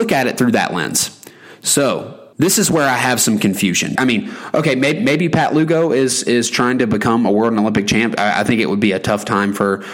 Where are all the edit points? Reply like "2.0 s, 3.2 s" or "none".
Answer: 2.3 s, 3.9 s